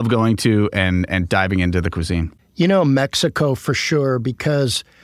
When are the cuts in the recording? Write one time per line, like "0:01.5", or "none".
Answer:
none